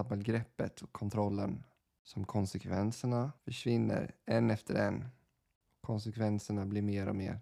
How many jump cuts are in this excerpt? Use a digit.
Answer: 1